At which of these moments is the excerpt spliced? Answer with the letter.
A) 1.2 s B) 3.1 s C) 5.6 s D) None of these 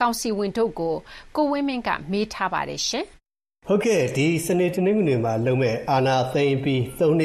B